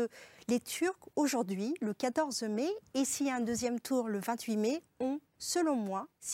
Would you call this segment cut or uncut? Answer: cut